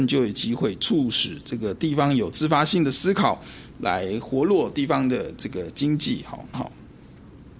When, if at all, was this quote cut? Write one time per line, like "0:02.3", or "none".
0:06.5